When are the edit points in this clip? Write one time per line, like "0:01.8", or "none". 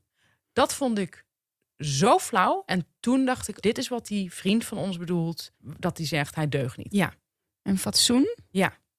0:03.6
0:05.5
0:06.9